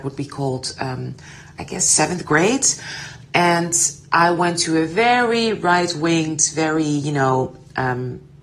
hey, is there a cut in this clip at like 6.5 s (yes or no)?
no